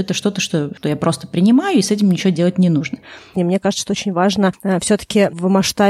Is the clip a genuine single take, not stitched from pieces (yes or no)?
no